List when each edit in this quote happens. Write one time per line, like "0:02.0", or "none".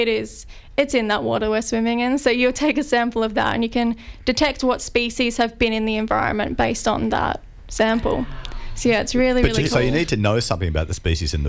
none